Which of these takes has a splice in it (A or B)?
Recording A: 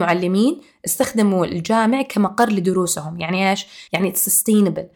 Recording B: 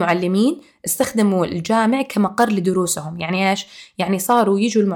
A